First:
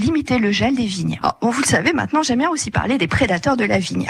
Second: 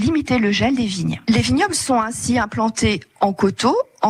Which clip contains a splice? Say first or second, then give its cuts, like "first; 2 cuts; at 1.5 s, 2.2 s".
first; 1 cut; at 1.2 s